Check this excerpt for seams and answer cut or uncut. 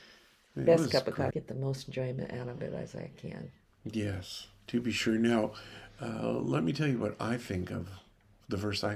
cut